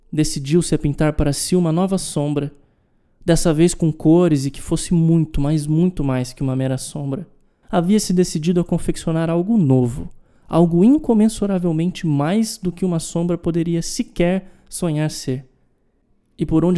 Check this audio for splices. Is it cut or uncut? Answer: cut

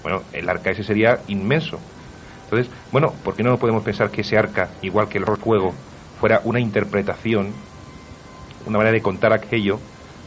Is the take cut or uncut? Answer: uncut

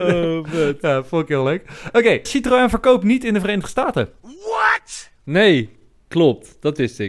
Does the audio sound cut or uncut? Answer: cut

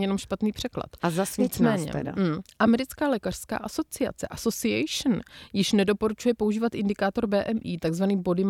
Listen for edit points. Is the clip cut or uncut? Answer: uncut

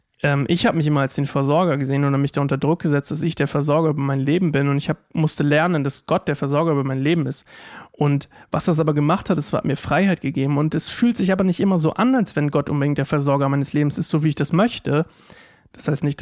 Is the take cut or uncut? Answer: uncut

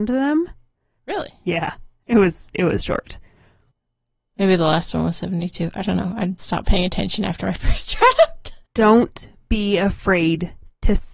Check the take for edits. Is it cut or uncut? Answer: cut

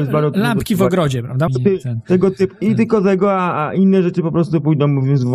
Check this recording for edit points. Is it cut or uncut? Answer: cut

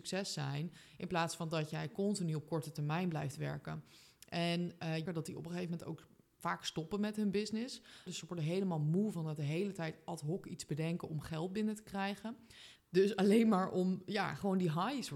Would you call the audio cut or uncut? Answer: cut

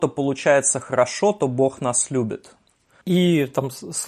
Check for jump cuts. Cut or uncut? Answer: cut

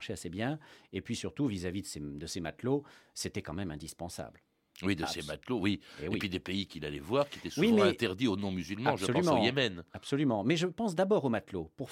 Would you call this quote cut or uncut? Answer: uncut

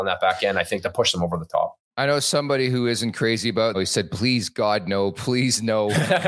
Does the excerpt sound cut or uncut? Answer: cut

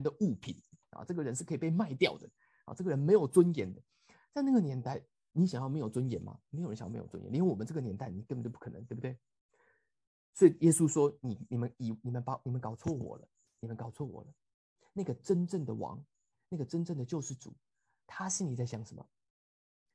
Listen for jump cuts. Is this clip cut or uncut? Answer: uncut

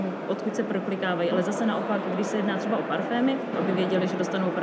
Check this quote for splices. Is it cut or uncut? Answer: cut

